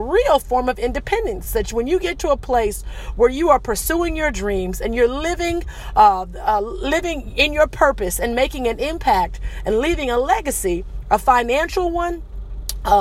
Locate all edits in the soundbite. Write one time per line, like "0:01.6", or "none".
none